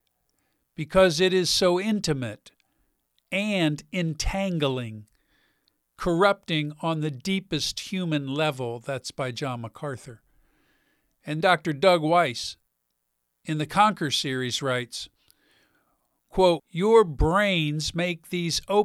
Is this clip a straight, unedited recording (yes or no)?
no